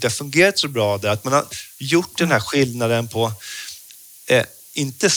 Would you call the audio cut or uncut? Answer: uncut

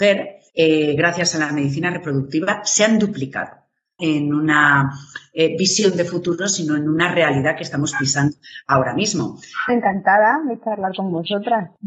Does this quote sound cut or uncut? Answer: cut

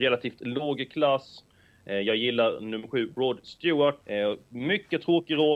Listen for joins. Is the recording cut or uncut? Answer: cut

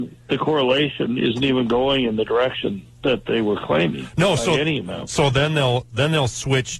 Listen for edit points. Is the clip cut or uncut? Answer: uncut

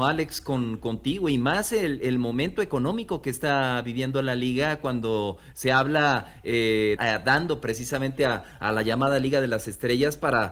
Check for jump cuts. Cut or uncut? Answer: cut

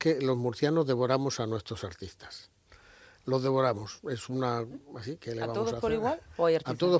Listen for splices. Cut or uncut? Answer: uncut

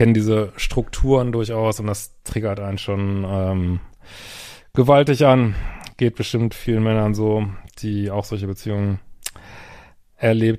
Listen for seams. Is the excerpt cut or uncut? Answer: uncut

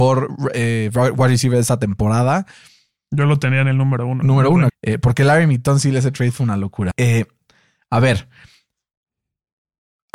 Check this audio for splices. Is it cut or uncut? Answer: cut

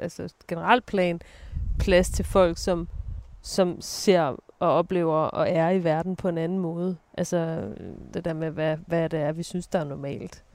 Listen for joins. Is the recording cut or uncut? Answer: cut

